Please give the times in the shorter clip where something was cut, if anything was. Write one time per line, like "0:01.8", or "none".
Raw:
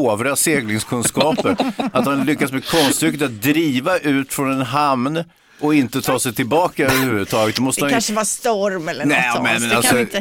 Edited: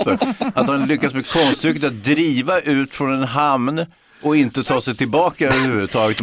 none